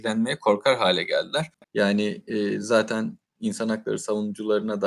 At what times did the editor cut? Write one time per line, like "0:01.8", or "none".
none